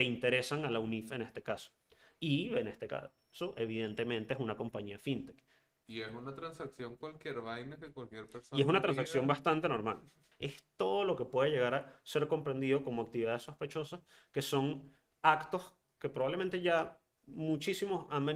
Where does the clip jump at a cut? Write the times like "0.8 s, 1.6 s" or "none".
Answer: 10.3 s